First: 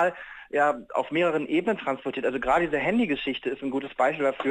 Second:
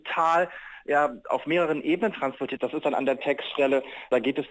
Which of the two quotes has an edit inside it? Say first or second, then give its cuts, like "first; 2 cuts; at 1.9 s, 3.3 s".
second; 1 cut; at 2.6 s